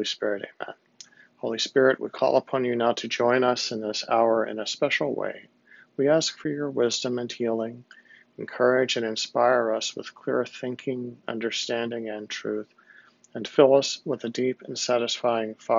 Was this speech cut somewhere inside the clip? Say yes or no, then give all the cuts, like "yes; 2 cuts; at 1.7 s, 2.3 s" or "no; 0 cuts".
no; 0 cuts